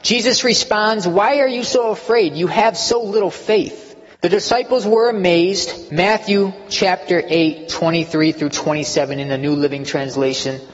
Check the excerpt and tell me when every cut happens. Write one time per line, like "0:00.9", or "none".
0:04.1
0:05.9